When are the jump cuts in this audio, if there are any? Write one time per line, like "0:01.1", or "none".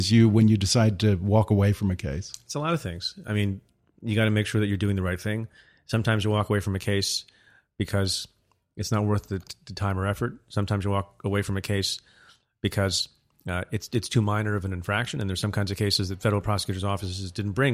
none